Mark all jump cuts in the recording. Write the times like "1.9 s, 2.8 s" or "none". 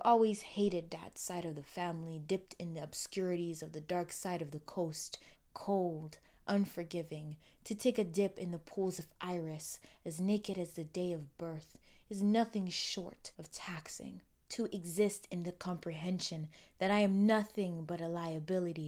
5.3 s, 13.3 s